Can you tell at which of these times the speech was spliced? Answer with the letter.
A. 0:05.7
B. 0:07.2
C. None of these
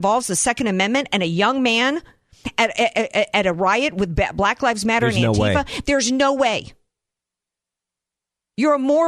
C